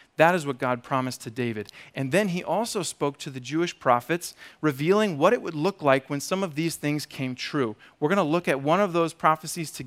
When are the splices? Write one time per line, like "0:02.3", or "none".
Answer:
none